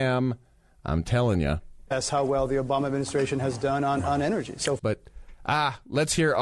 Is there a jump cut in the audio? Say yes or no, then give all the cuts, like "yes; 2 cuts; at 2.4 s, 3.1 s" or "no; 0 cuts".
yes; 1 cut; at 4.8 s